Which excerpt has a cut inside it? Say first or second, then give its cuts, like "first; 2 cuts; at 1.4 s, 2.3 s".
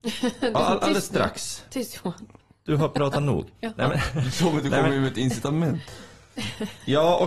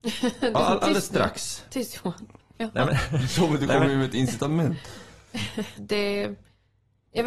second; 2 cuts; at 2.5 s, 5.8 s